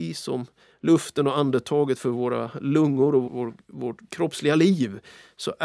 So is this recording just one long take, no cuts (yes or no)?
no